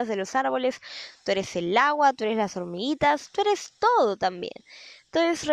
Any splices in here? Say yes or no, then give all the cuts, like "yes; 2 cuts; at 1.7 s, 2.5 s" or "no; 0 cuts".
no; 0 cuts